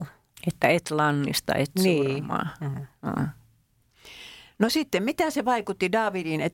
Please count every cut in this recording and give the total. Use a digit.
0